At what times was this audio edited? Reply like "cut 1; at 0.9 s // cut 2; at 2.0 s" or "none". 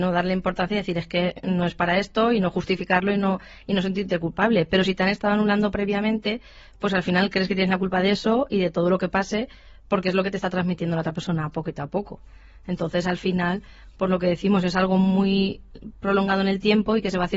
none